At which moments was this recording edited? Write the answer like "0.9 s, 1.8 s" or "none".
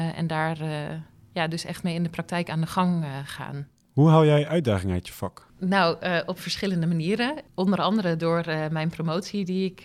none